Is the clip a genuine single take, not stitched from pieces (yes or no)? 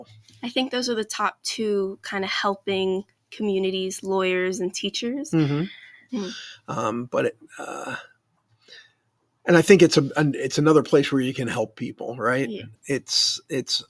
no